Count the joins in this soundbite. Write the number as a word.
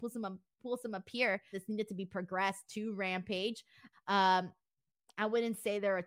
two